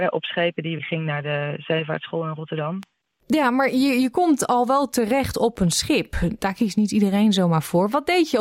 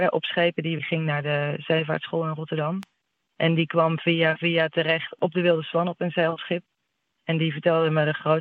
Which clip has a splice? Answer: first; 1 cut; at 3.2 s

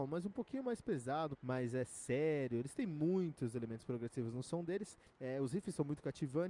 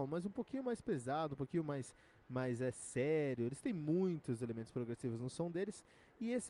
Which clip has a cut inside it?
first; 2 cuts; at 1.3 s, 5.1 s

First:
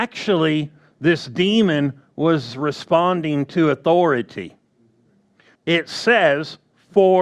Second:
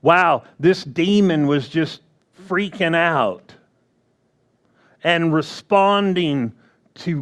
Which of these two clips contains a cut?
first; 1 cut; at 5.6 s

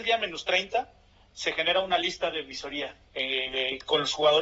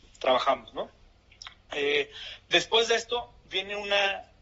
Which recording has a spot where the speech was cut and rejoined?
first; 1 cut; at 3.0 s

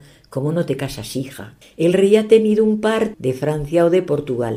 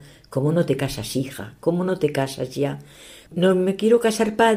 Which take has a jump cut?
first; 2 cuts; at 1.6 s, 3.1 s

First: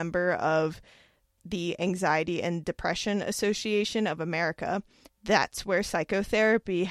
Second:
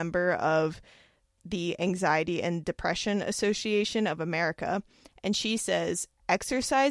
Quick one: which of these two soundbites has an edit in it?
first; 1 cut; at 5.1 s

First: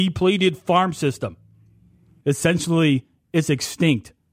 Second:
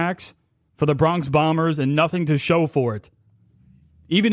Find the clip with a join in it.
first; 1 cut; at 2.2 s

